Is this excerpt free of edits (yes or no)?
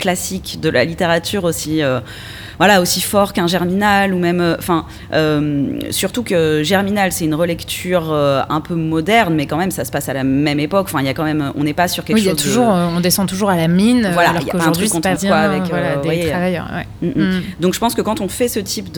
no